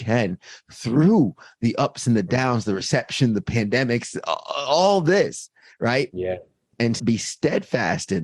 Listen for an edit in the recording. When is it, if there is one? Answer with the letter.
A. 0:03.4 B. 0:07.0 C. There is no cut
B